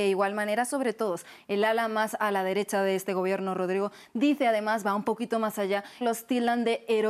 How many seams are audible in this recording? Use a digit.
1